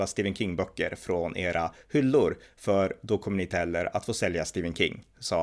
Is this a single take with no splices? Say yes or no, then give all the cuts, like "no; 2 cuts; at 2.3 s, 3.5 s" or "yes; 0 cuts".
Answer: yes; 0 cuts